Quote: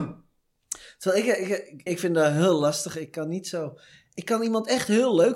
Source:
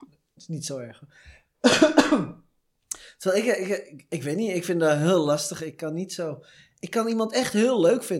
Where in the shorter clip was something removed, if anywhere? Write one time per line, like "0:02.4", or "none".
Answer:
0:01.9